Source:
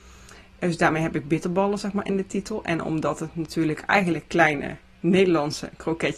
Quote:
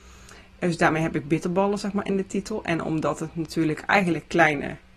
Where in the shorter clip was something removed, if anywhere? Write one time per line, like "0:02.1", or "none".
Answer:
none